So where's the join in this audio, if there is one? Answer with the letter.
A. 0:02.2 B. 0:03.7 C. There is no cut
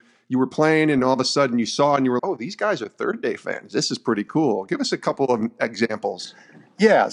A